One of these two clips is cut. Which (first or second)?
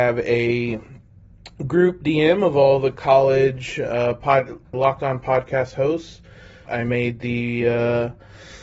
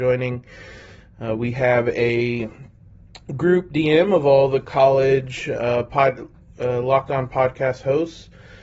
first